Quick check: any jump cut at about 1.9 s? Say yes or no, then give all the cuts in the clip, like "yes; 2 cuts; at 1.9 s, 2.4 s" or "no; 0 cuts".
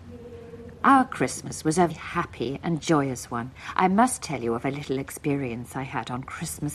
yes; 1 cut; at 1.9 s